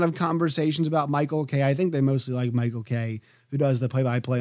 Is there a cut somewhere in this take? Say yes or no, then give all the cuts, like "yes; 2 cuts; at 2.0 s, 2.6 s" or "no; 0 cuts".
no; 0 cuts